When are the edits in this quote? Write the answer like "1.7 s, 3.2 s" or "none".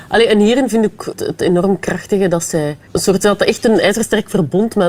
1.1 s, 2.9 s